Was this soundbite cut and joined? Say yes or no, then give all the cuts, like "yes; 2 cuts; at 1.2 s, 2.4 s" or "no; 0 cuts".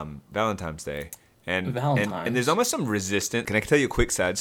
yes; 1 cut; at 3.4 s